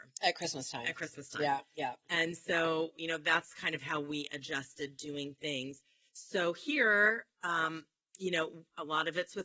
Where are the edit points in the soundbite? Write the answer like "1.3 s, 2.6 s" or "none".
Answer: none